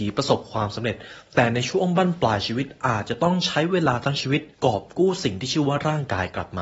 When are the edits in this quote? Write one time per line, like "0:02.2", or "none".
0:04.5